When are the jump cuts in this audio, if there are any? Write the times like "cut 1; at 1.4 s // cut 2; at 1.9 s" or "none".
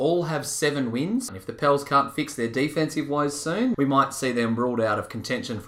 cut 1; at 1.3 s // cut 2; at 3.7 s